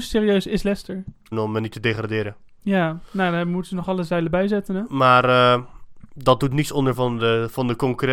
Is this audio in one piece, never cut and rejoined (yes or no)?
no